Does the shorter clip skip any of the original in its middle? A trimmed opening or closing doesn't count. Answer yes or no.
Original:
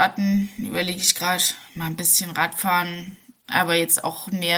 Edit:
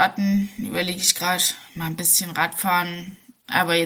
no